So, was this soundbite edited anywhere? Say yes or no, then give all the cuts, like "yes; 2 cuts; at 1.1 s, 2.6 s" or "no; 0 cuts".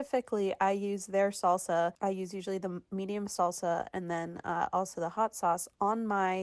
no; 0 cuts